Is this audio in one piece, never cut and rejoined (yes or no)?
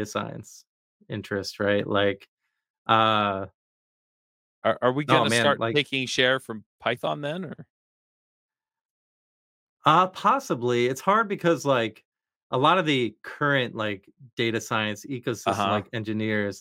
yes